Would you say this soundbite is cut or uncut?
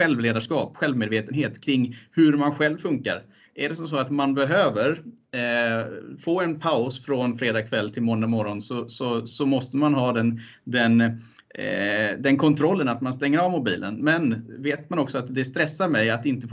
uncut